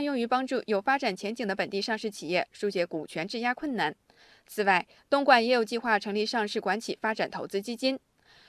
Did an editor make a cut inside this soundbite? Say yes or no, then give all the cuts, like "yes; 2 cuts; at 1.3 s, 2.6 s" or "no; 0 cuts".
no; 0 cuts